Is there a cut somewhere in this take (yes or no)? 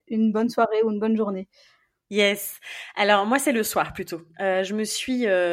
no